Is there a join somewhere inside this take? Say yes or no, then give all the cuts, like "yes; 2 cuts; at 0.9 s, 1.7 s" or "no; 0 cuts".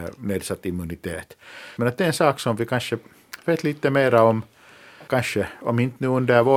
yes; 2 cuts; at 1.8 s, 5.1 s